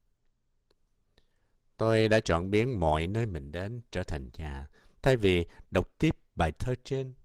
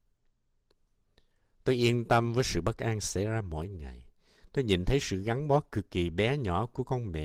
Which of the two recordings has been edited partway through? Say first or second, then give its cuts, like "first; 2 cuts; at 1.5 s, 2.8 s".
second; 1 cut; at 1.6 s